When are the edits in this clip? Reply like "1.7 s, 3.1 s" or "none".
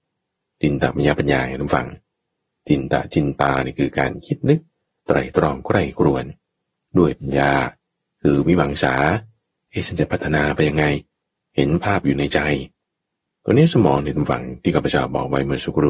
none